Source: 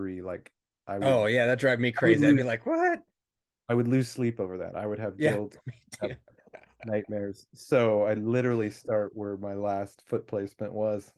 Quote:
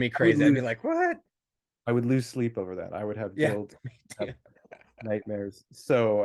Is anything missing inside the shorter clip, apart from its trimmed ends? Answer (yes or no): no